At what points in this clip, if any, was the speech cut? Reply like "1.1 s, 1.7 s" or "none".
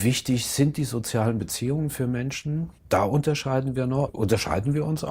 2.8 s, 4.1 s